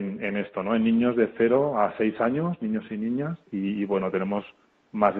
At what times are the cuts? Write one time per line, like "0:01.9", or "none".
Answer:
0:03.4